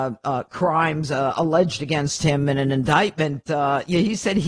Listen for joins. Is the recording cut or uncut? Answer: uncut